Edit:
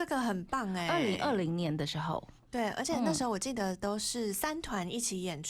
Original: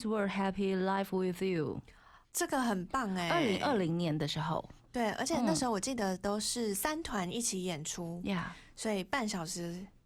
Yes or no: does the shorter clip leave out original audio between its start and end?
no